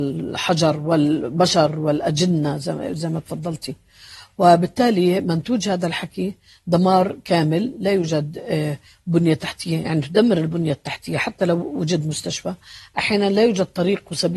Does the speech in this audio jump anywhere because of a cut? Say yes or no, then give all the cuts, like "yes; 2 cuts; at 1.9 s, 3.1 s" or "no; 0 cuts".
no; 0 cuts